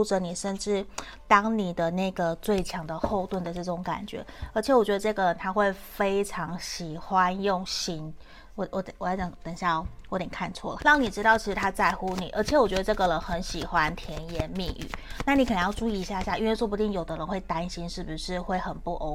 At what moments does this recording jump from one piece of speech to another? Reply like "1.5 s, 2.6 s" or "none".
10.8 s